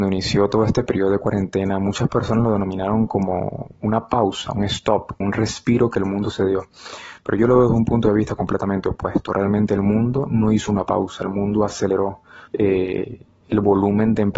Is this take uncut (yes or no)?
no